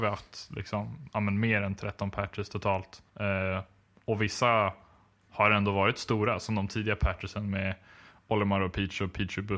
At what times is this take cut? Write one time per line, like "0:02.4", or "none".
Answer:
0:03.1